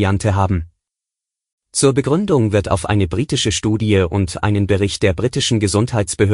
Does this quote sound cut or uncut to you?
uncut